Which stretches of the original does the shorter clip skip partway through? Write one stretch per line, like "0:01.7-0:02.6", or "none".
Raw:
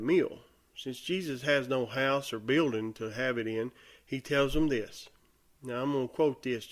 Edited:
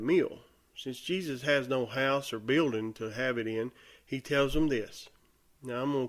none